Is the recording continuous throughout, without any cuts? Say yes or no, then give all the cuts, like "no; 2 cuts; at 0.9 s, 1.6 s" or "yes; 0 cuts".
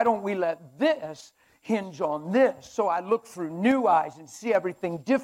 yes; 0 cuts